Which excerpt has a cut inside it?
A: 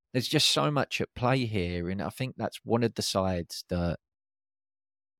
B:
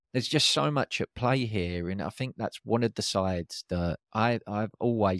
B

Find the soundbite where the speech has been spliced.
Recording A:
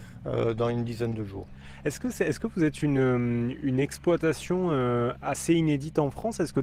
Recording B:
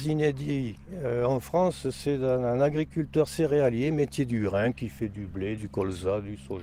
B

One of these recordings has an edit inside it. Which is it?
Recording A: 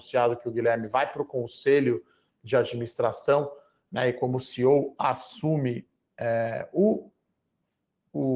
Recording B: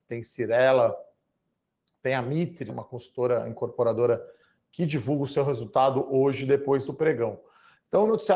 B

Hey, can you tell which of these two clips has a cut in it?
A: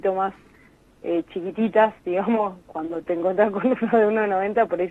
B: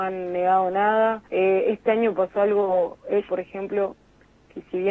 B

